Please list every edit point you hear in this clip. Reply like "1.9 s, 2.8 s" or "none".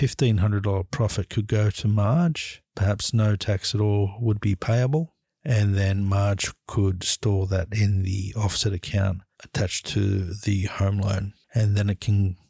11.4 s